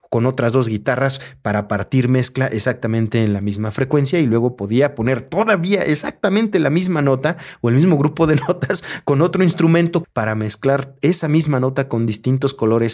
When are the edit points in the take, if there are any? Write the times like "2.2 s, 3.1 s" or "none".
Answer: 10.0 s